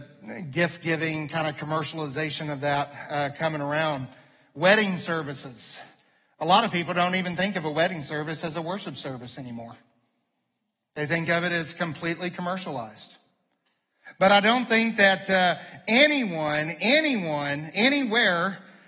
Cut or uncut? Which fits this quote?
uncut